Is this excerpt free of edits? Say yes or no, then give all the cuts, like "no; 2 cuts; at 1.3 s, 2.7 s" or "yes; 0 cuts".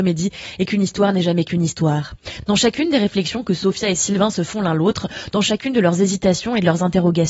yes; 0 cuts